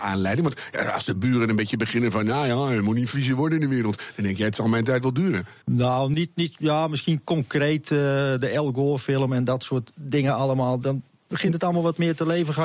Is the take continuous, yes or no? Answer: no